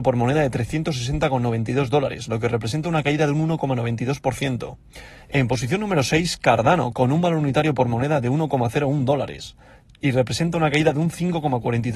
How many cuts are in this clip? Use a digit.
2